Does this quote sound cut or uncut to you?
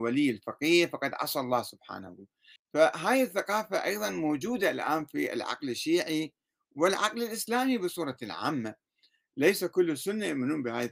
cut